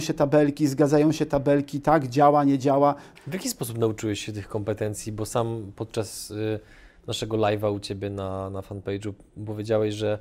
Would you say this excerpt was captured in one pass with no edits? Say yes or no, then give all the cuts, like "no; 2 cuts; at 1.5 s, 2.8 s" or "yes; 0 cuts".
no; 1 cut; at 3.2 s